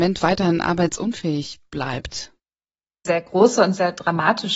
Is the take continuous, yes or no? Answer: yes